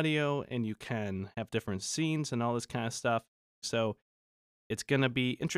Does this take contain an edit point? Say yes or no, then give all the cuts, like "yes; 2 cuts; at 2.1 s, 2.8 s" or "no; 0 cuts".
yes; 1 cut; at 3.6 s